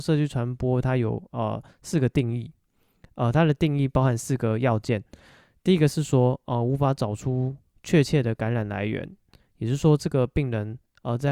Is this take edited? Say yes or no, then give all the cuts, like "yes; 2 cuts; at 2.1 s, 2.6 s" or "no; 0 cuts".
no; 0 cuts